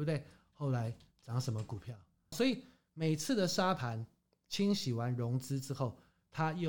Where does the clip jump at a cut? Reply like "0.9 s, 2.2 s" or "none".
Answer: 2.3 s